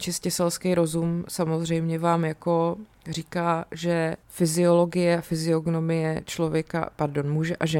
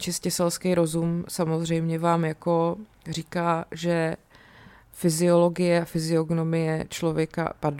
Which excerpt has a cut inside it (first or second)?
first